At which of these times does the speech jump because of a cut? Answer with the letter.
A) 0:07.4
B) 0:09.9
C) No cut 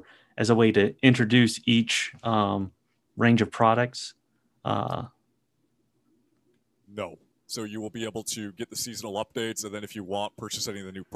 A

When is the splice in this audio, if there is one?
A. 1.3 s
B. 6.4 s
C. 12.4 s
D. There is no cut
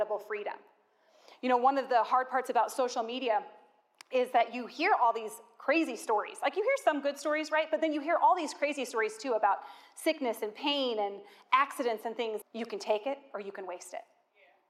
C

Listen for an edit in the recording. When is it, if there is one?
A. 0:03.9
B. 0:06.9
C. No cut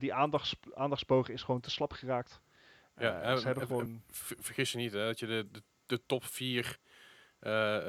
C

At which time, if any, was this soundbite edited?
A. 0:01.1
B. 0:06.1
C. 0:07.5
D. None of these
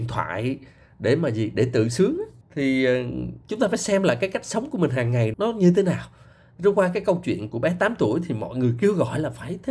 C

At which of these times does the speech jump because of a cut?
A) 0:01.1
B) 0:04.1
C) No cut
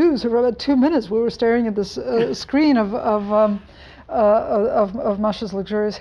C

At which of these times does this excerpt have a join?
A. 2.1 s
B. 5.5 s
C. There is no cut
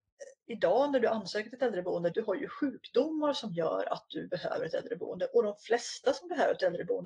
A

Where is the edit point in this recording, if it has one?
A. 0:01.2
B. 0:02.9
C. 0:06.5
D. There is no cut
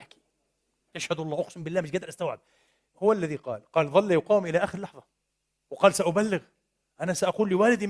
B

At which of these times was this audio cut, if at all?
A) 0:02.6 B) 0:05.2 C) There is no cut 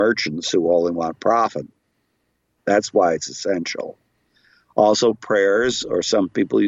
A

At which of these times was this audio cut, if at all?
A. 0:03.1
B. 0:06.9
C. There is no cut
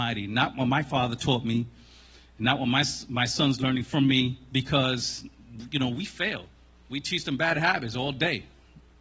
B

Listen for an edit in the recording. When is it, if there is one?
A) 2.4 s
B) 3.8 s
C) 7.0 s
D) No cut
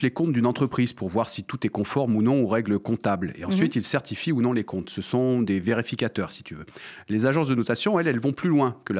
D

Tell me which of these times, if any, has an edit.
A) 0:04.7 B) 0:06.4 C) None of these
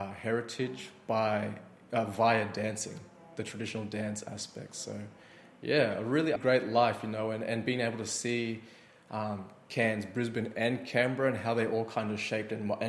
B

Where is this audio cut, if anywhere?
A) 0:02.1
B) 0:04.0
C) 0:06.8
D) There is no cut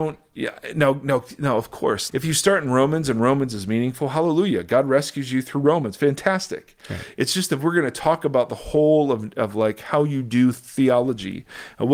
A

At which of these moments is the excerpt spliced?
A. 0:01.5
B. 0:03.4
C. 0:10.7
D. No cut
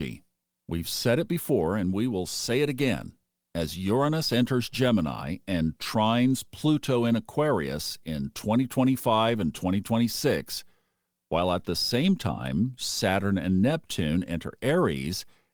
D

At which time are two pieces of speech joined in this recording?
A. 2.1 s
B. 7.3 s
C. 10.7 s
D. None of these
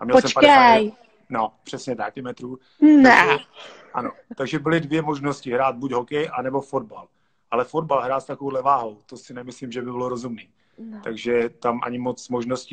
A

